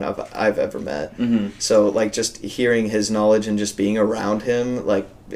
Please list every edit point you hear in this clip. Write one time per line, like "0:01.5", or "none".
none